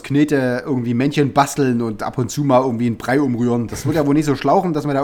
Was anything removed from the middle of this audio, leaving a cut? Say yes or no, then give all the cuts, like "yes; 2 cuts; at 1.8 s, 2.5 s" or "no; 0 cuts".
no; 0 cuts